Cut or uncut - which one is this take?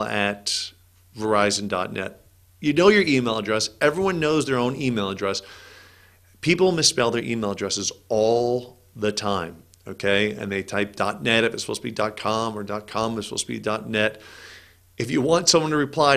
uncut